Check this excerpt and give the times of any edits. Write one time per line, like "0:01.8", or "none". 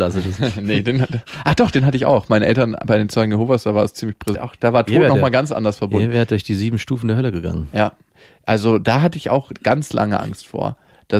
0:04.3